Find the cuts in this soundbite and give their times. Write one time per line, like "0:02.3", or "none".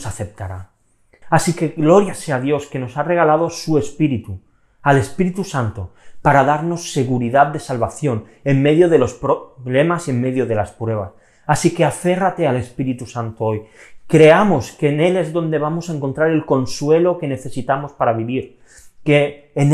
0:01.2